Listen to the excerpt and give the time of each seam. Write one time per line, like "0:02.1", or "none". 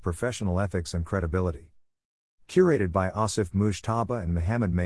none